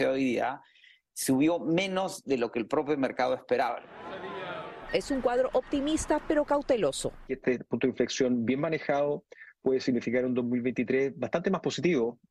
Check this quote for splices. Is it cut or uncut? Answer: cut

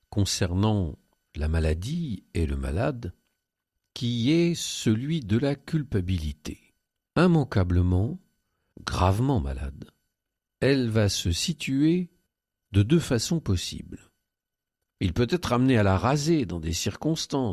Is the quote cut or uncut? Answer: cut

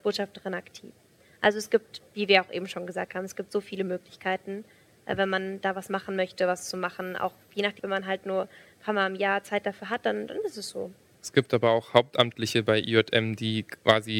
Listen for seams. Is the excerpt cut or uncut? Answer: cut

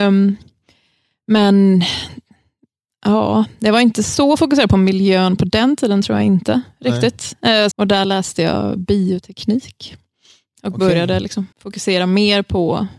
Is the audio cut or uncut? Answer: cut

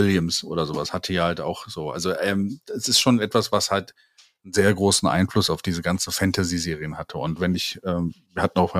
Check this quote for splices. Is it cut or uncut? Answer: uncut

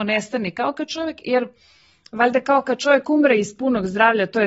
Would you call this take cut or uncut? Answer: uncut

